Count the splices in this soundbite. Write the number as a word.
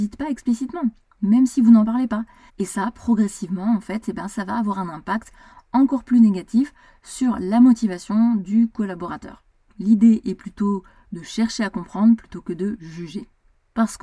two